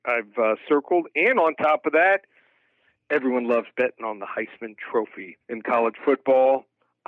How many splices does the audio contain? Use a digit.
1